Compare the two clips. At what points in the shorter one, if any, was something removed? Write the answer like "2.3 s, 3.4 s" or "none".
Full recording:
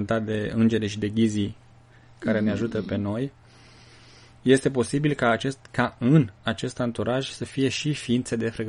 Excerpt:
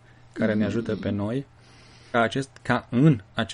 2.1 s